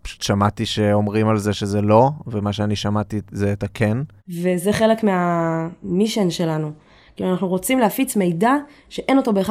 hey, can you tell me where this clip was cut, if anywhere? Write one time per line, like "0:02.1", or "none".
0:04.2